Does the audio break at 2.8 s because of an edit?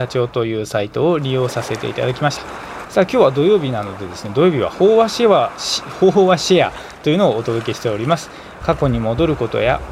yes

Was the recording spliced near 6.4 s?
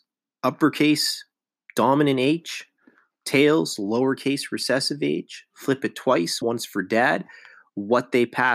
yes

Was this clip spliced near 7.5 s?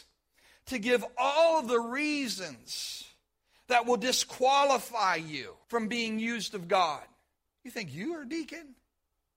yes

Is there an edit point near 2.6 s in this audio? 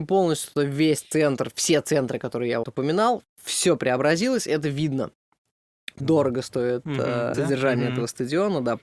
yes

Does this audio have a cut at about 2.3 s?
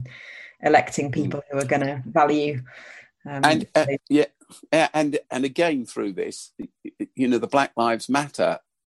no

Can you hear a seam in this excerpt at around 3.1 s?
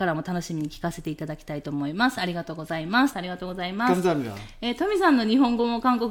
yes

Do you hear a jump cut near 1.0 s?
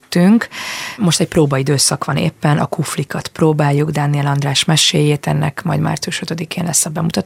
yes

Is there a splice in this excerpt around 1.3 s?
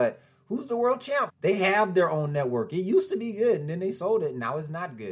yes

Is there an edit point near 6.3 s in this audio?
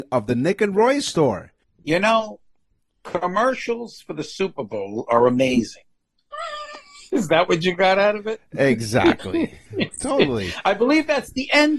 yes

